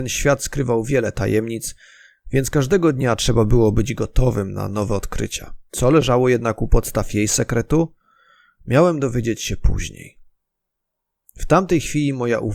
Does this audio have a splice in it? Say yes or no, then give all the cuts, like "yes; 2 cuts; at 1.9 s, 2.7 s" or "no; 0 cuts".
yes; 1 cut; at 5.7 s